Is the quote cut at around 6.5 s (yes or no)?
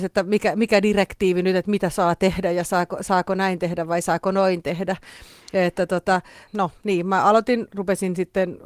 yes